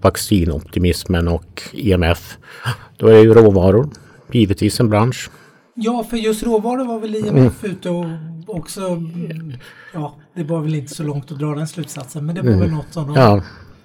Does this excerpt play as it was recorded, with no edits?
yes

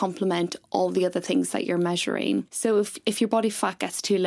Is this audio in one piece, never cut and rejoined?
no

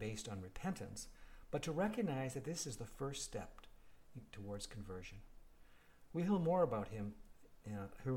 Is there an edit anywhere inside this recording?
yes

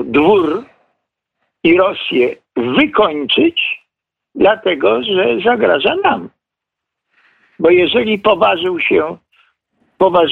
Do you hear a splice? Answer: yes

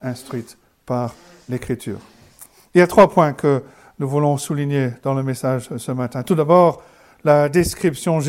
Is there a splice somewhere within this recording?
no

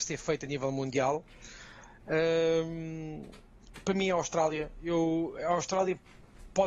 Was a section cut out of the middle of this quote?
no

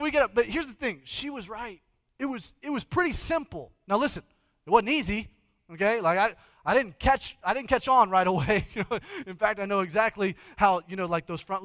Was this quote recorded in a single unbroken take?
yes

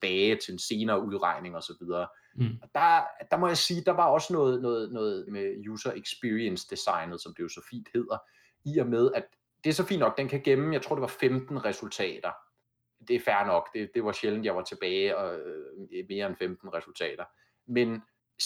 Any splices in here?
yes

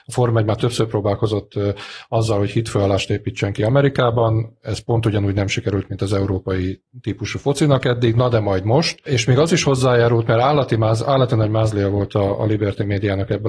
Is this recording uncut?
yes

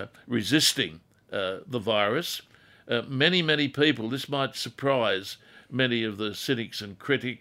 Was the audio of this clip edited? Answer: no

